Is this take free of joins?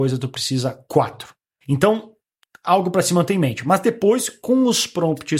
no; 1 cut; at 1.6 s

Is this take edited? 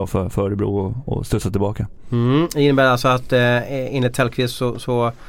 no; 0 cuts

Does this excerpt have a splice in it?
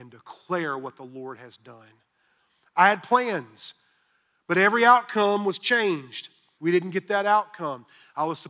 yes; 1 cut; at 6.6 s

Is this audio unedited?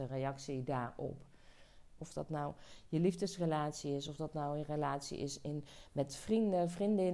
no; 1 cut; at 2.0 s

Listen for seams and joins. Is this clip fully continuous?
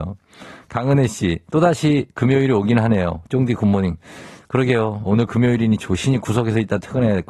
no; 1 cut; at 5.0 s

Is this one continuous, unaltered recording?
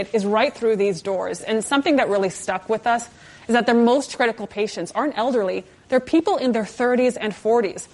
yes; 0 cuts

